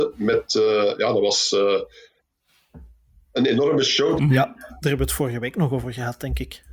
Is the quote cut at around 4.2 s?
yes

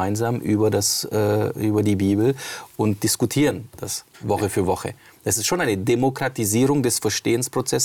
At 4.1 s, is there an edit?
yes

